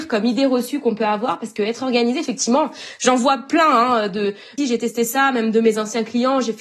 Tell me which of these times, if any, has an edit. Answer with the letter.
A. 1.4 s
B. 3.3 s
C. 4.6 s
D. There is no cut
C